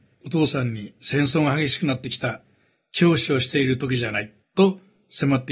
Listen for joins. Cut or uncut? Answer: cut